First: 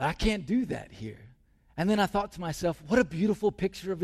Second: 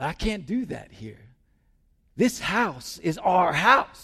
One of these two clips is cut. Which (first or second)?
first